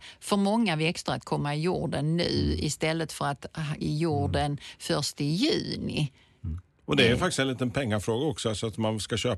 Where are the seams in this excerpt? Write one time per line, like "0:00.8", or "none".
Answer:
0:03.8